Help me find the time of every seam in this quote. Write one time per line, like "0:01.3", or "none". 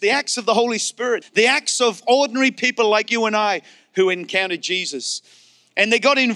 0:01.2